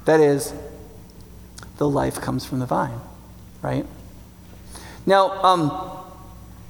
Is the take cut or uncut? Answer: uncut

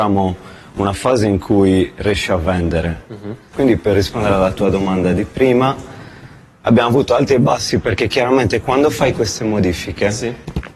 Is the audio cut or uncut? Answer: cut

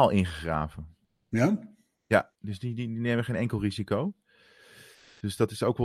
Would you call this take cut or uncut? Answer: uncut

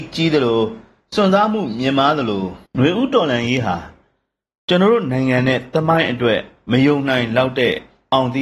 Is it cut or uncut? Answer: cut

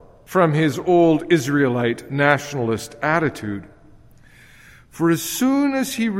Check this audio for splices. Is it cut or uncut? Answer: uncut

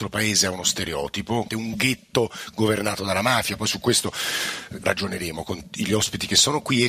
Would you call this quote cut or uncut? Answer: cut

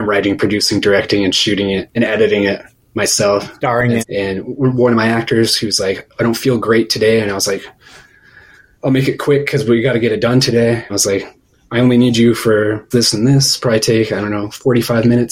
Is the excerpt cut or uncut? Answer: cut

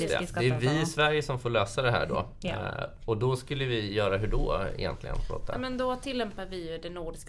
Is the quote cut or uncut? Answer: uncut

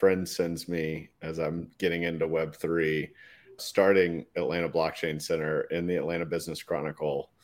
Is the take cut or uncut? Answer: cut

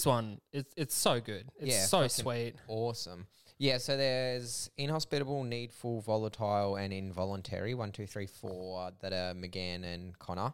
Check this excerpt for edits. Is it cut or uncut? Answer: uncut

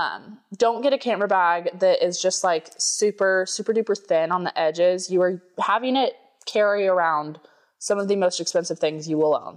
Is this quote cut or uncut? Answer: uncut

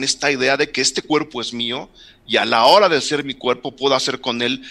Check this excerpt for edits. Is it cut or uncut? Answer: uncut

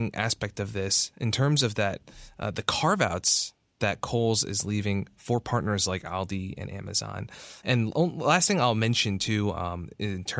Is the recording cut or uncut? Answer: cut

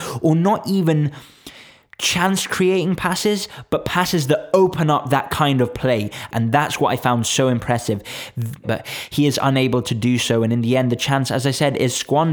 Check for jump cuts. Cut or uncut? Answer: cut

